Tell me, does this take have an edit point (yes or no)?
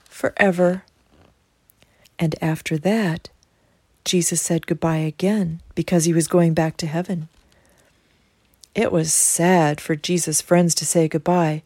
yes